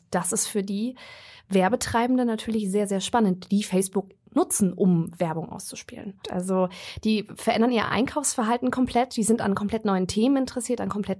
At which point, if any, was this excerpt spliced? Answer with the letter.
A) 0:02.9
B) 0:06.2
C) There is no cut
B